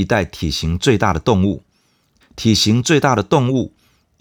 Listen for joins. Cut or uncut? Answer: cut